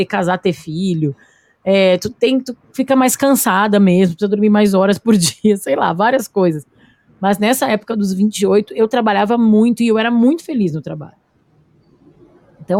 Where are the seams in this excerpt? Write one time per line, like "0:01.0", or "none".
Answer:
none